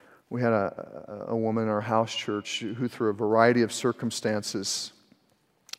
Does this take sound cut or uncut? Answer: uncut